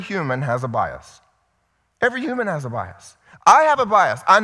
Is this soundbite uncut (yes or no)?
yes